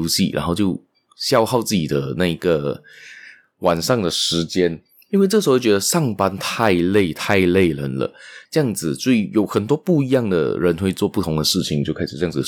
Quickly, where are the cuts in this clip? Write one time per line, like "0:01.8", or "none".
0:08.5